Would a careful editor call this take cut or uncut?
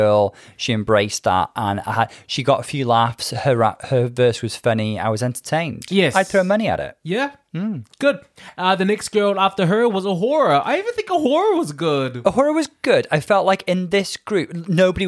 uncut